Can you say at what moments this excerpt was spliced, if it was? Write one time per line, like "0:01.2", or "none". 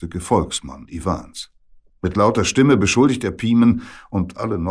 0:01.9